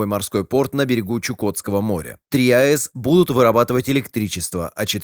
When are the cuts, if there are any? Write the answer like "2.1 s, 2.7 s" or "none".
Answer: 2.3 s